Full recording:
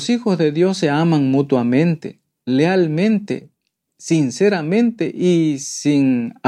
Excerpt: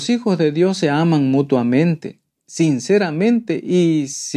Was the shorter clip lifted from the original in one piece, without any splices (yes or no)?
no